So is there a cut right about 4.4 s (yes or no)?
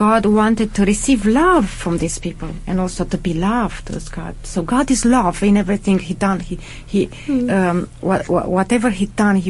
no